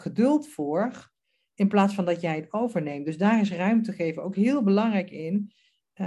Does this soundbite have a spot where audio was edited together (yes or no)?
no